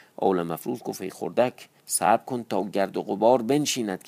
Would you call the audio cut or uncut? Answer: cut